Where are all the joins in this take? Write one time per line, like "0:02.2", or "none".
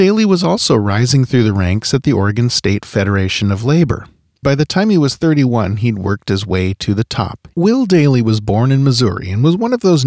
0:04.4
0:07.5